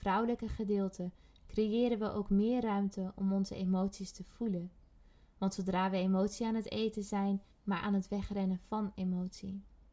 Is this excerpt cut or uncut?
cut